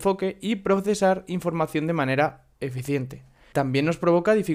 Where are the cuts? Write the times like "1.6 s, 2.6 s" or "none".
3.5 s